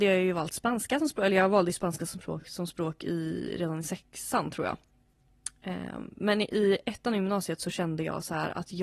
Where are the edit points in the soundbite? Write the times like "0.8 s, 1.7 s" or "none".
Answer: none